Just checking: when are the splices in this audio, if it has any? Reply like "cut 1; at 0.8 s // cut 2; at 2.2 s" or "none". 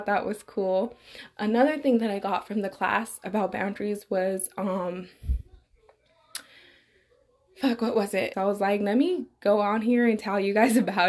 cut 1; at 8.3 s

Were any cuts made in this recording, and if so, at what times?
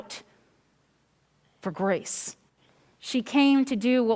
cut 1; at 3.0 s

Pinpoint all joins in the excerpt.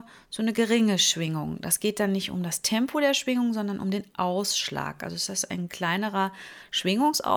none

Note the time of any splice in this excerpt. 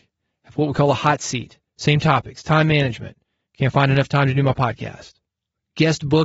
cut 1; at 1.7 s

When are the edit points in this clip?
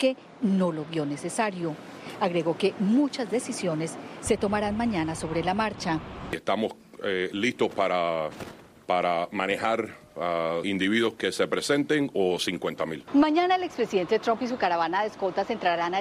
cut 1; at 10.6 s // cut 2; at 13.1 s

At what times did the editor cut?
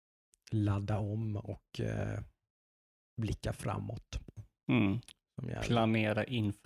none

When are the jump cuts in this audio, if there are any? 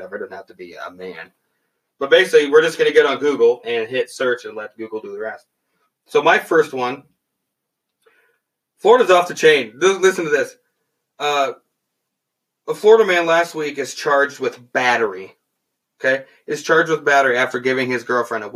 cut 1; at 3.6 s

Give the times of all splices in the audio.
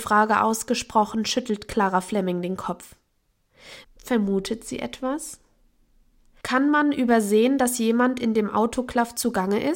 cut 1; at 3.8 s // cut 2; at 6.4 s

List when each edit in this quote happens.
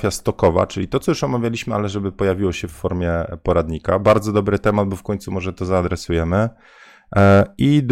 none

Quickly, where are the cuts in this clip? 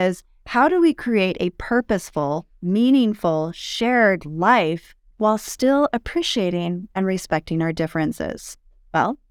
none

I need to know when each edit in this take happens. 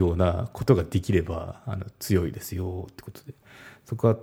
none

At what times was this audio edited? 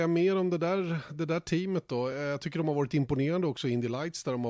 none

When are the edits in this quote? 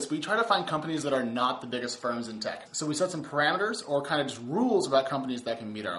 cut 1; at 2.7 s

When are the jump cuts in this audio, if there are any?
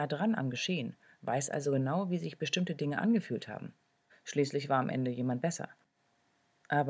cut 1; at 4.1 s

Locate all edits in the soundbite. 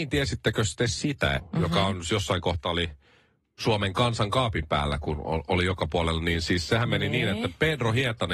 cut 1; at 1.4 s

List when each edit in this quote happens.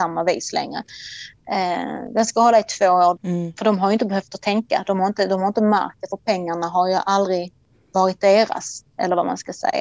cut 1; at 3.2 s

